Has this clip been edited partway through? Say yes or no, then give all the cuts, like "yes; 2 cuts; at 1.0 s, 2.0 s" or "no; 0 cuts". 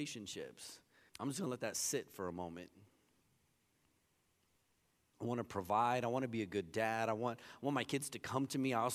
yes; 2 cuts; at 1.1 s, 5.1 s